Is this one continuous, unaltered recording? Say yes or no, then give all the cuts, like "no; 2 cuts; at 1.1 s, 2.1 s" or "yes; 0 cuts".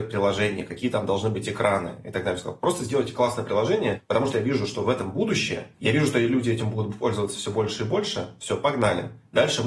no; 1 cut; at 5.7 s